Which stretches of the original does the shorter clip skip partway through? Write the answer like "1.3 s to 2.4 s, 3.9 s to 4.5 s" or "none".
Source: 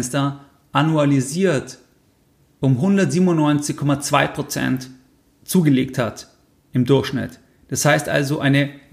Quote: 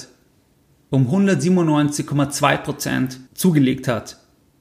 5.0 s to 5.4 s